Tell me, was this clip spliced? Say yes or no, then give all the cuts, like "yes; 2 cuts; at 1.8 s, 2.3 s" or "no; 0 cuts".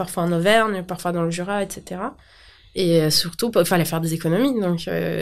no; 0 cuts